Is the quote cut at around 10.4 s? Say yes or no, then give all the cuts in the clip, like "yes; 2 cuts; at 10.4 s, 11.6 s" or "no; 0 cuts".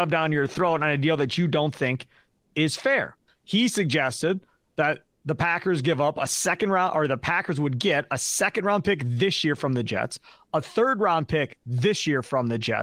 no; 1 cut; at 3.3 s